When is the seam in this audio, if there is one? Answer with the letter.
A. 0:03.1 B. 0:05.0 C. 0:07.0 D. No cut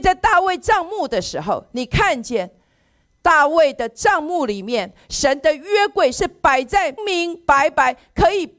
C